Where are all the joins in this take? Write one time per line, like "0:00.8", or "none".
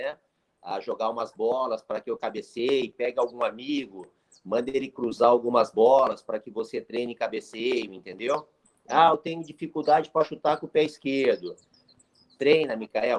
none

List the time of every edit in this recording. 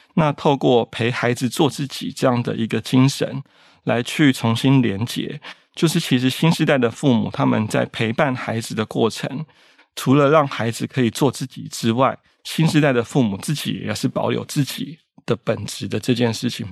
none

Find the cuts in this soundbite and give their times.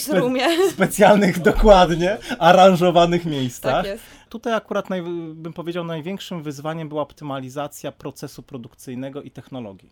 0:04.3

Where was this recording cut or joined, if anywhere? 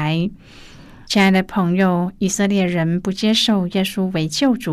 0:01.1

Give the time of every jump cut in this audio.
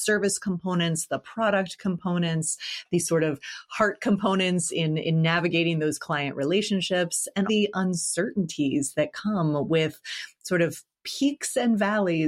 0:07.5

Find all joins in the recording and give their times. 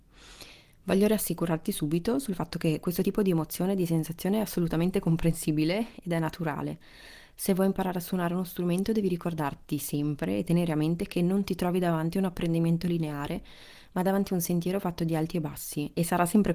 none

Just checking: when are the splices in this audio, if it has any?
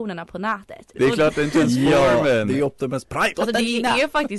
0:00.9
0:03.3

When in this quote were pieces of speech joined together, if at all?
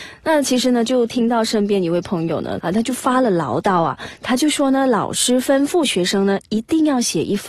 0:02.6

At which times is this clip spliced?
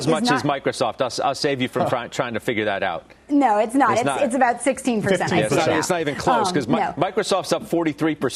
none

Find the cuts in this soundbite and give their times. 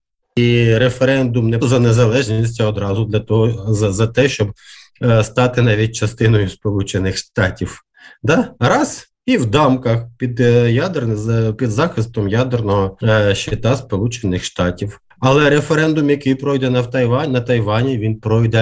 0:01.6

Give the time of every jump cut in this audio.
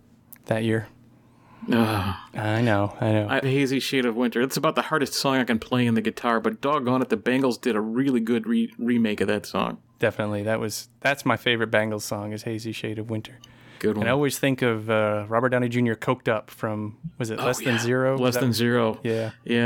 0:03.4

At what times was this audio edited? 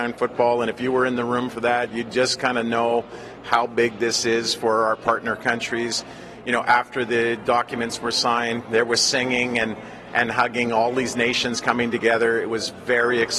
none

